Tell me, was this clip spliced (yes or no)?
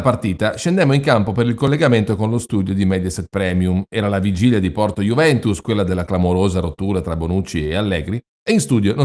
no